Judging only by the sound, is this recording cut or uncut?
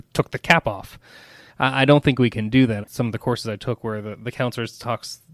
cut